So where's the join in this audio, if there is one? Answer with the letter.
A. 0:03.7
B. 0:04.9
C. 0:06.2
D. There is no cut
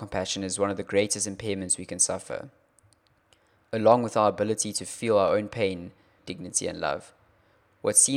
C